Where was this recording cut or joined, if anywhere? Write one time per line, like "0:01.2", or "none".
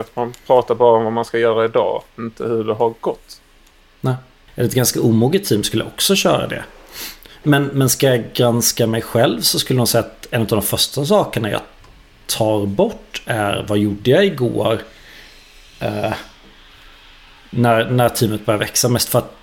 0:04.5